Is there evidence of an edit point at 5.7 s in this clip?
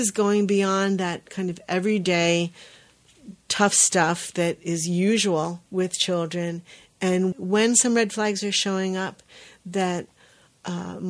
yes; 2 cuts; at 5.7 s, 7.3 s

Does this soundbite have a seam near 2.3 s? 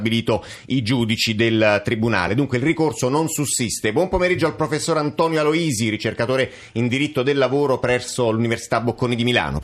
no; 0 cuts

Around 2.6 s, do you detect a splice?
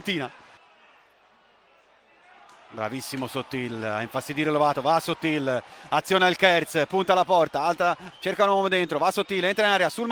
no; 1 cut; at 8.1 s

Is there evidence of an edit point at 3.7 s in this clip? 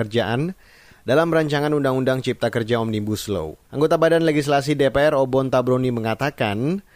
yes; 1 cut; at 3.7 s

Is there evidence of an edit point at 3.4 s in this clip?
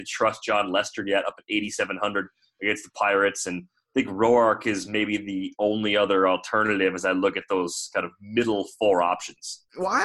no; 0 cuts

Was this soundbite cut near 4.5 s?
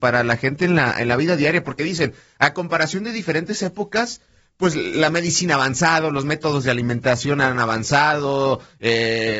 no; 0 cuts

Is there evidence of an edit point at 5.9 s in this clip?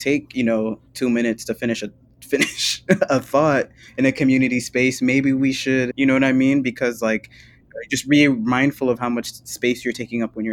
yes; 1 cut; at 5.9 s

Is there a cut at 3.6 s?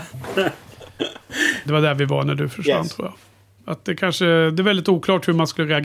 yes; 2 cuts; at 1.7 s, 3.6 s

